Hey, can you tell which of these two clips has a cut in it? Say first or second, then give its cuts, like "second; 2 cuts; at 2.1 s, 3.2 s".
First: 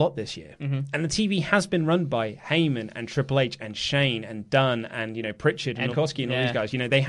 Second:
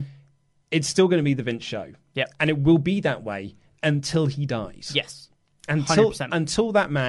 first; 1 cut; at 5.9 s